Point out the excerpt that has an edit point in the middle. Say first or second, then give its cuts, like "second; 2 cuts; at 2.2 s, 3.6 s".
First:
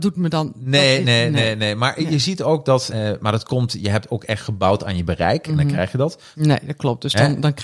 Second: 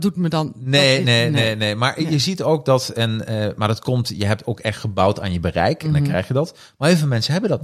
first; 2 cuts; at 2.9 s, 6.3 s